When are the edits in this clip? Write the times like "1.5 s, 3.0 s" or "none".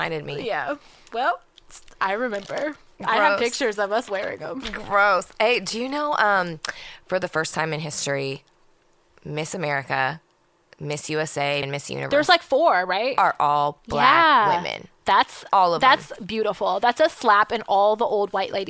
11.6 s